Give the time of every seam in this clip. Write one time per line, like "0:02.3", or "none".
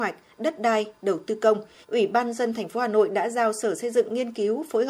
0:01.8